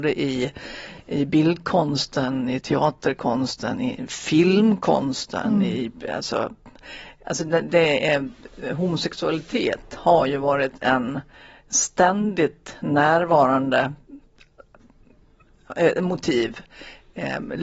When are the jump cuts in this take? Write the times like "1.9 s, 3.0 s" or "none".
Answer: none